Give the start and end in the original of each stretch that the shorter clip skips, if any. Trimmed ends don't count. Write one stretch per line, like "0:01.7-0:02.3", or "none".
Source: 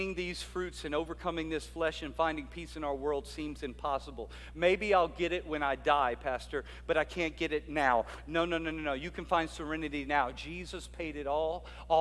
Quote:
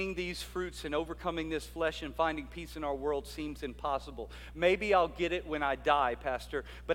none